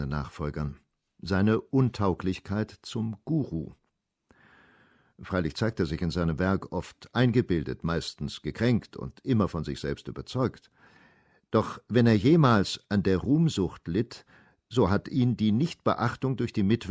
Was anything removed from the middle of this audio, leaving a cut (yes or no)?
no